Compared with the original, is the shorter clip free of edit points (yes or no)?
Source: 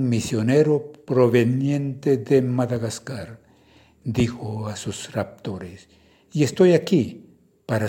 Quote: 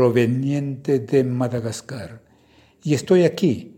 no